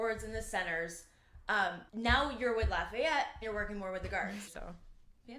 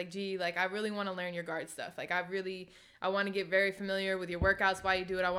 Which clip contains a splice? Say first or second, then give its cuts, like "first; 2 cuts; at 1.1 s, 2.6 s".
first; 3 cuts; at 1.9 s, 3.4 s, 4.5 s